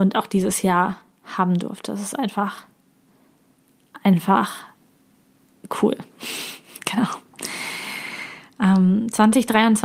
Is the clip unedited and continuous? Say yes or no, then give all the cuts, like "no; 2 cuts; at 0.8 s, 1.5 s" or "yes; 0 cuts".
yes; 0 cuts